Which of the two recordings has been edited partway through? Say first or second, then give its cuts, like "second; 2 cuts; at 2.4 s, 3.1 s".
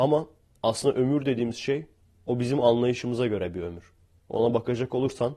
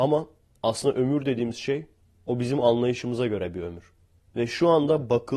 second; 1 cut; at 4.3 s